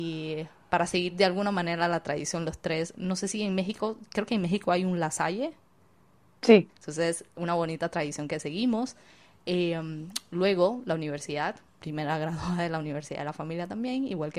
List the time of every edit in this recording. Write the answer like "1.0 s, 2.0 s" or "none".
6.7 s